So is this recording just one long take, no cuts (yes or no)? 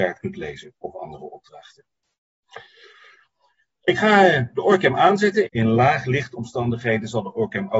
no